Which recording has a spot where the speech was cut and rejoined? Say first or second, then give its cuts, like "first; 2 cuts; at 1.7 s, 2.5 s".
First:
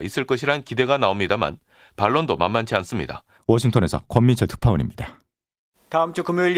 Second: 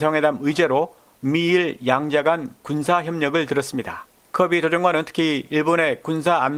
first; 1 cut; at 3.4 s